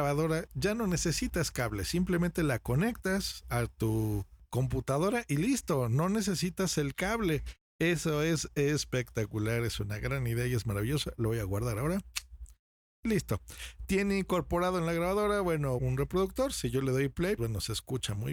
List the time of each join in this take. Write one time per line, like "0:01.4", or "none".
0:15.8
0:17.4